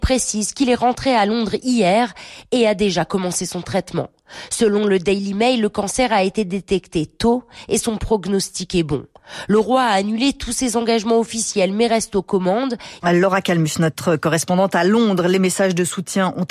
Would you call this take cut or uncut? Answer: cut